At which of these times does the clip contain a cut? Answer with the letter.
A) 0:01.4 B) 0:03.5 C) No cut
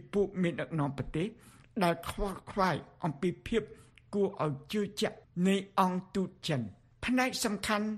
C